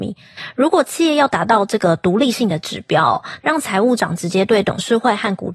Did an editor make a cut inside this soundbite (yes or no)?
yes